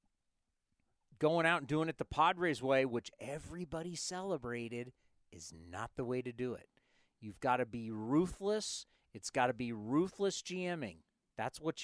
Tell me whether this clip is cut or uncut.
uncut